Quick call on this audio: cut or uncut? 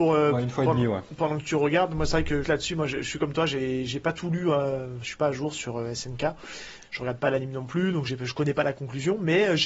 cut